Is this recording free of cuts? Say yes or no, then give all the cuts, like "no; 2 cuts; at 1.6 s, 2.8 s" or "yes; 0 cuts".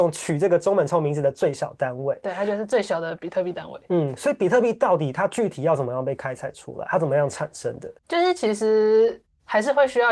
no; 1 cut; at 8.0 s